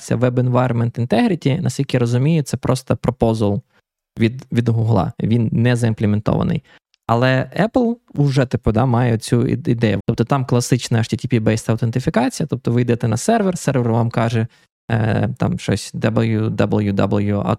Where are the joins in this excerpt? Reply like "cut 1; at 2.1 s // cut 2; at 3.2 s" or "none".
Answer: cut 1; at 10.0 s